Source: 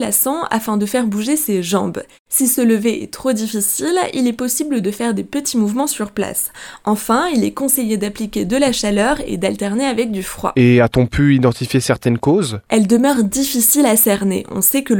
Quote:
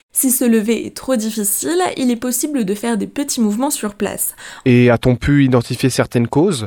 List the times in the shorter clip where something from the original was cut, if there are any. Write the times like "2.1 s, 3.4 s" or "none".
4.6 s

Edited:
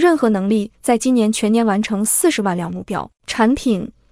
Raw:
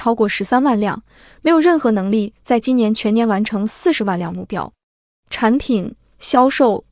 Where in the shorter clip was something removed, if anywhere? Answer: 3.2 s

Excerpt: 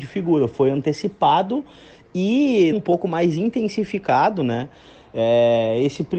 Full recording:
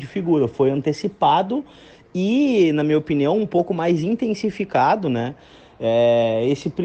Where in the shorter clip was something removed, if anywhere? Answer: 2.7 s

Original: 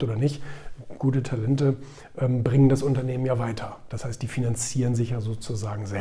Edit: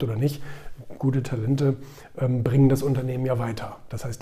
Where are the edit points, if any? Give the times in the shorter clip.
none

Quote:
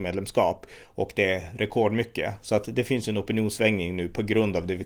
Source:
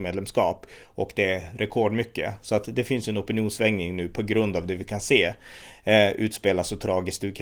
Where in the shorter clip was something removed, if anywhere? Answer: none

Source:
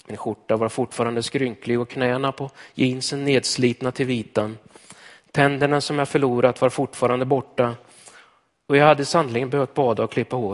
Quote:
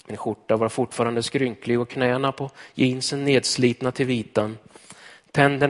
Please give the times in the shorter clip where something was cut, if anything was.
none

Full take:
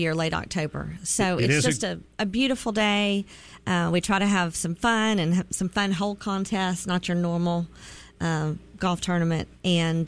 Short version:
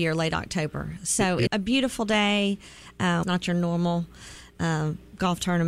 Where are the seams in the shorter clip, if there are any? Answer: 1.5 s, 3.2 s

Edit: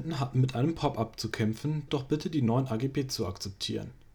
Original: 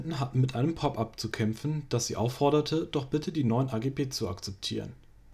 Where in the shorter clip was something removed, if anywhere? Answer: 1.9 s

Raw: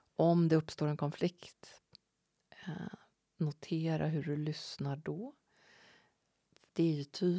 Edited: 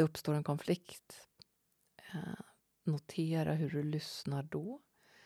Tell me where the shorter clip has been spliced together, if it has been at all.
none

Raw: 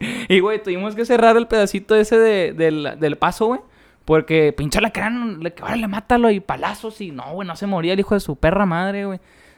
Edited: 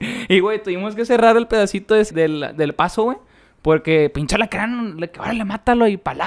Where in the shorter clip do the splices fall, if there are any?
2.1 s

